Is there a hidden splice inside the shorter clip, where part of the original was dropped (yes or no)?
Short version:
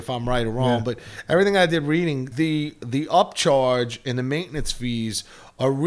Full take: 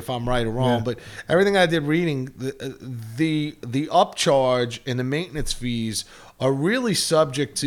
yes